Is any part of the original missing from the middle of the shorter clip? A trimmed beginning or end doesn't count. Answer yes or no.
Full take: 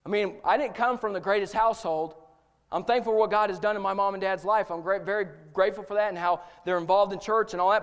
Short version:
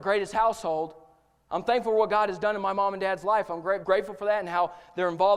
yes